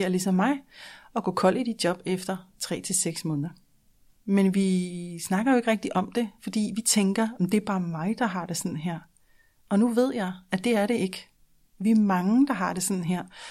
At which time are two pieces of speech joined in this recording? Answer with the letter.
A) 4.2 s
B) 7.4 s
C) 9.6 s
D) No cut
A